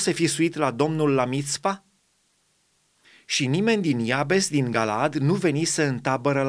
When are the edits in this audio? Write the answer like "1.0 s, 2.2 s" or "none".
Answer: none